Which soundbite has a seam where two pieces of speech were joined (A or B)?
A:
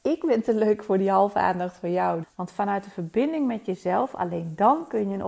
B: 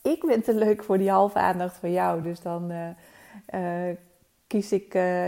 A